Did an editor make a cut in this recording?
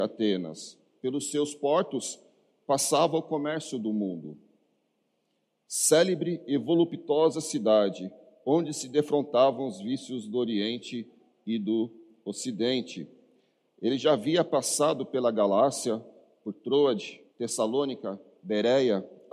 yes; 3 cuts; at 1.0 s, 13.7 s, 17.3 s

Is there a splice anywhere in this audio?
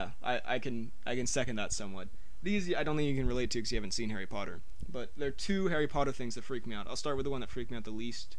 no; 0 cuts

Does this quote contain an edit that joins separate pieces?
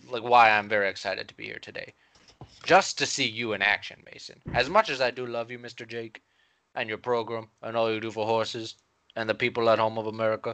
yes; 1 cut; at 9.1 s

